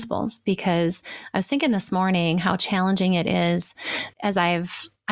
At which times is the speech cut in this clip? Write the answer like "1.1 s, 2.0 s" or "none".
4.1 s